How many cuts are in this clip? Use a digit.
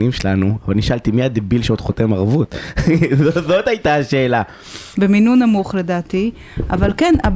1